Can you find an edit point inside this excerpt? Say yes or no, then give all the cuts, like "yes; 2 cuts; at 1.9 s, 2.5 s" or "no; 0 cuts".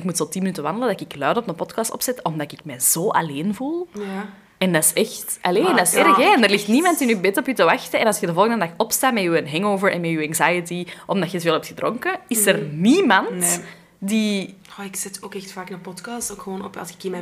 no; 0 cuts